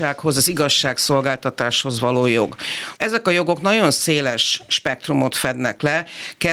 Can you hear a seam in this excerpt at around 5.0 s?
no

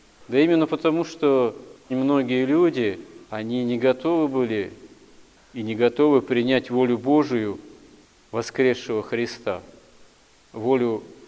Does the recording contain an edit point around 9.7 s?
no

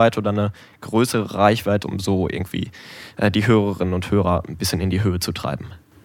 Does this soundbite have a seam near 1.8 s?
yes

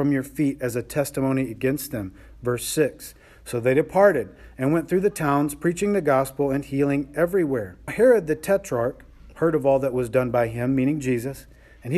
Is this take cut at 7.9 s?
yes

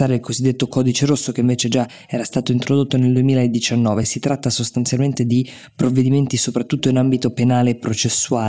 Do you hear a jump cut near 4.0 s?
no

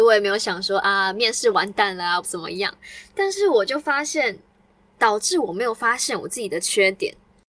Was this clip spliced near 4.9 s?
yes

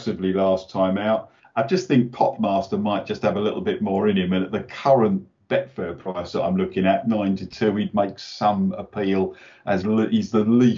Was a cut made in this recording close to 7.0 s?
no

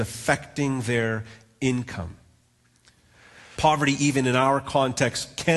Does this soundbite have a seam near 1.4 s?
no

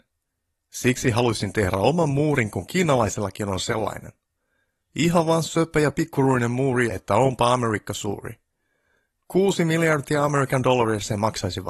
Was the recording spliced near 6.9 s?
yes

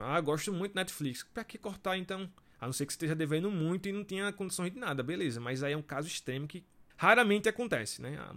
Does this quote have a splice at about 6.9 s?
yes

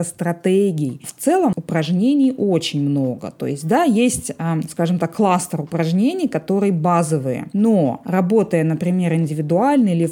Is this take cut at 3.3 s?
no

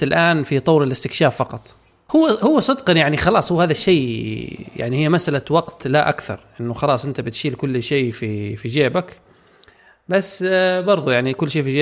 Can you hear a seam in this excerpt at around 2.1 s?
yes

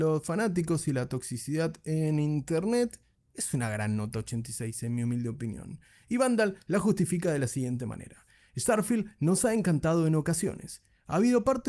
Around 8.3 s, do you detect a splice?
no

